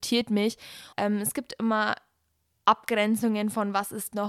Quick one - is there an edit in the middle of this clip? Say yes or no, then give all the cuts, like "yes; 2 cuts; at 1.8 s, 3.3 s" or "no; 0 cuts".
yes; 1 cut; at 0.9 s